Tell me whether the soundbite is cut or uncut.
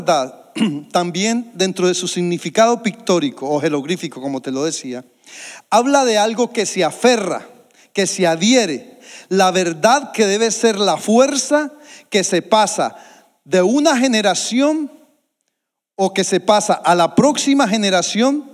uncut